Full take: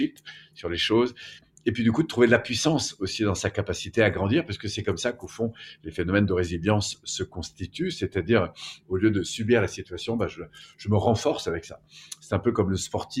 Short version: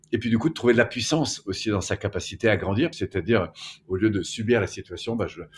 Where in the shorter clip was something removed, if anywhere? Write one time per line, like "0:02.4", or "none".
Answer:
0:02.9